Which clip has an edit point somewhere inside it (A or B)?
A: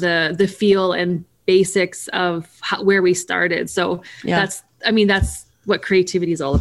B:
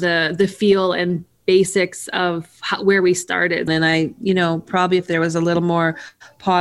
B